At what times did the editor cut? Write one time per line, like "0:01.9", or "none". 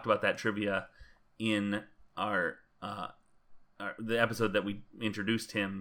none